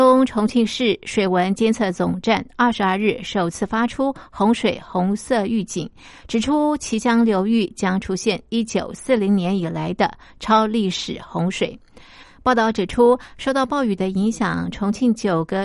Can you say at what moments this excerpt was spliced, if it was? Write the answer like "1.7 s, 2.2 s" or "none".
none